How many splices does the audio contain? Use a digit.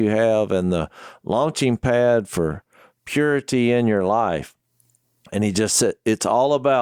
0